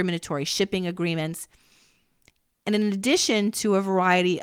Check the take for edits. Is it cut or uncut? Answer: uncut